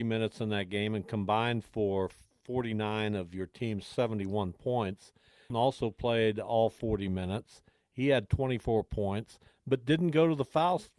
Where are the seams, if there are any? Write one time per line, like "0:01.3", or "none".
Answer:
0:05.5